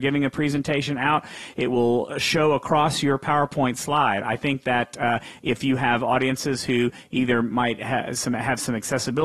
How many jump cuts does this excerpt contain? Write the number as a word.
zero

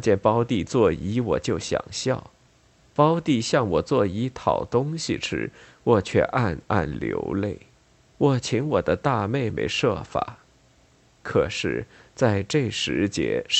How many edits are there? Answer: two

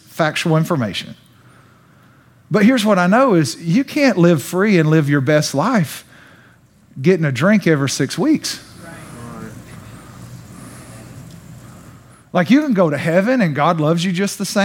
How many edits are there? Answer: zero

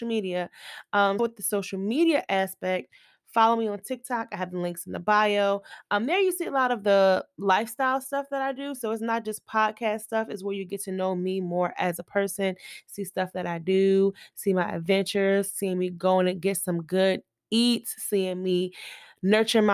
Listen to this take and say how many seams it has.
one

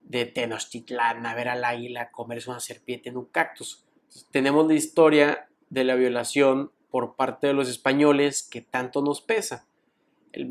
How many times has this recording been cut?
one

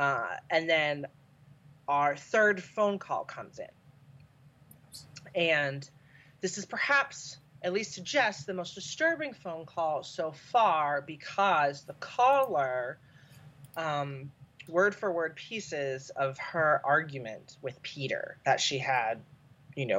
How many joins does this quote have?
two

